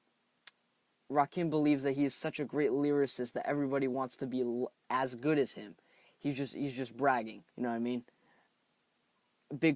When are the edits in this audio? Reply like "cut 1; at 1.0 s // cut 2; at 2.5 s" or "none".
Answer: cut 1; at 7.5 s